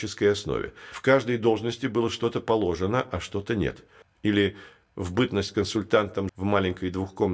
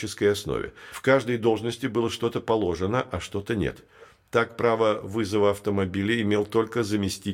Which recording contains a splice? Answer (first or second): first